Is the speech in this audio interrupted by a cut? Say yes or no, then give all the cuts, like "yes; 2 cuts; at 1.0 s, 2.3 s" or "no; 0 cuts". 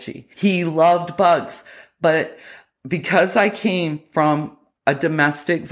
no; 0 cuts